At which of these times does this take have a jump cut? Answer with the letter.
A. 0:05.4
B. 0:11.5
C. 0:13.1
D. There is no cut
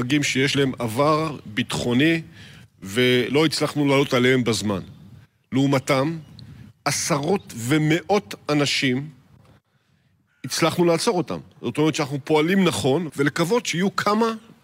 C